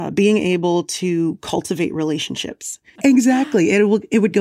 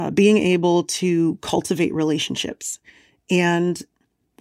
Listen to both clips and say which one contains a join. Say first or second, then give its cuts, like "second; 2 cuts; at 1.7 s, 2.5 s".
first; 1 cut; at 3.0 s